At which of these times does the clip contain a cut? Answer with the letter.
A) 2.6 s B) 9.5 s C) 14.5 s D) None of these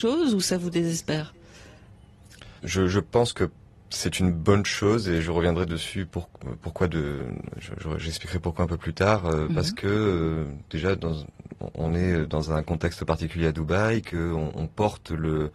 A